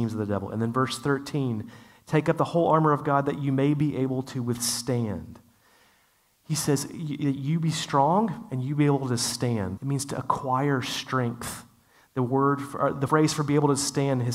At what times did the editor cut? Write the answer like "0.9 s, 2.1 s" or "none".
9.8 s